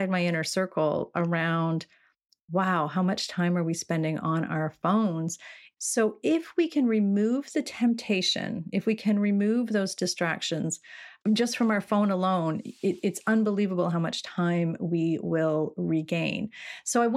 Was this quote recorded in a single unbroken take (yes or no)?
no